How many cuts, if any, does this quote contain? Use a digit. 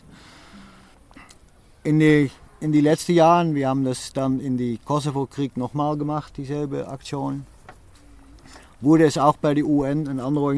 0